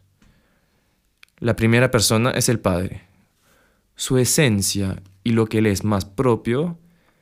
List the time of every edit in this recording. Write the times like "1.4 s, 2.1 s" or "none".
none